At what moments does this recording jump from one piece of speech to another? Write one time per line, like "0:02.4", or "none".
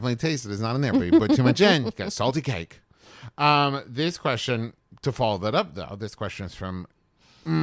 none